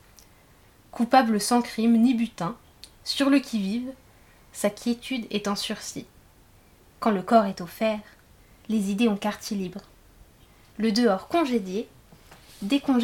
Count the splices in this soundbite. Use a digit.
1